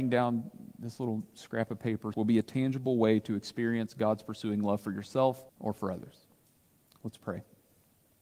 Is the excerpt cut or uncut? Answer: cut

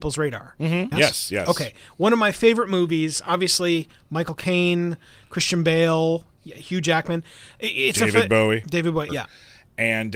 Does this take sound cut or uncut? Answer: cut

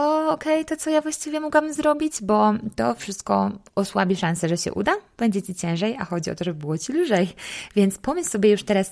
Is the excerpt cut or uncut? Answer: uncut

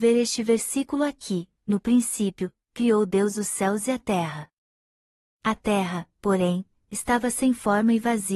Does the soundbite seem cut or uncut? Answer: uncut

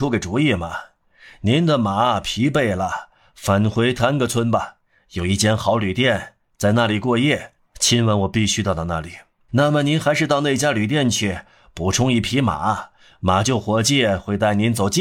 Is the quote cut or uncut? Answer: cut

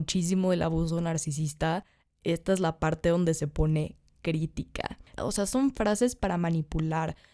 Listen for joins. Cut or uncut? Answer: cut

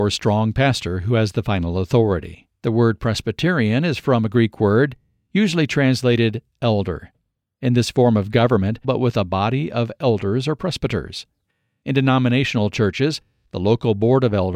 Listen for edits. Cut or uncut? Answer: cut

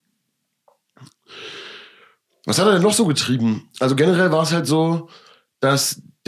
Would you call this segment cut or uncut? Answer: uncut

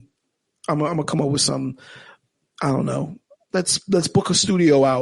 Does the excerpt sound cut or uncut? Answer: uncut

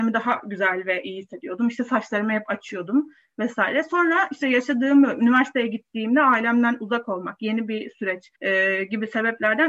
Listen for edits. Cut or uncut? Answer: cut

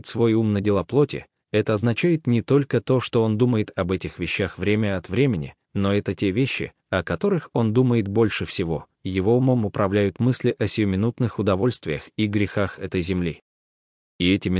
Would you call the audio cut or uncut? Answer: uncut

